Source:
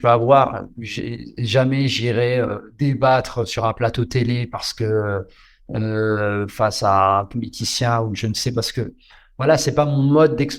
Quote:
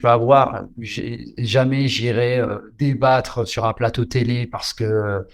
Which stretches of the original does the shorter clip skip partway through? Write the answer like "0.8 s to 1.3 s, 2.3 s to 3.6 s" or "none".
none